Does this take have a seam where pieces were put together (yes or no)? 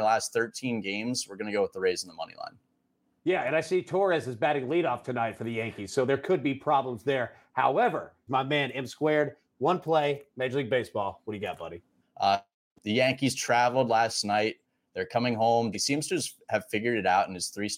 yes